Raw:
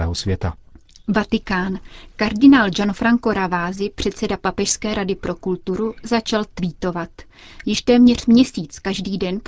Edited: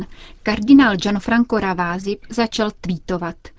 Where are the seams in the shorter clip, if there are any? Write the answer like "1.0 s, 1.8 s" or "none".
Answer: 2.2 s